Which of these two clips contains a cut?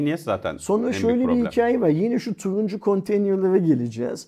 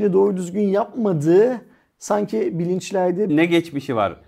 second; 1 cut; at 3.3 s

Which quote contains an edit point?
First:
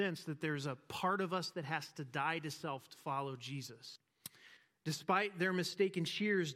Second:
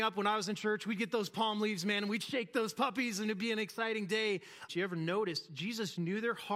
second; 1 cut; at 4.7 s

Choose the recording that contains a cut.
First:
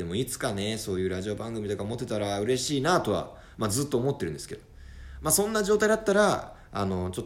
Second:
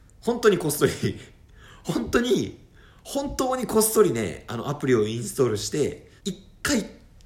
second; 1 cut; at 6.2 s

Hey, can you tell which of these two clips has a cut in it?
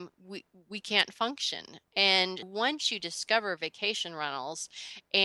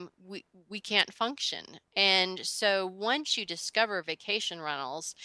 first; 1 cut; at 2.4 s

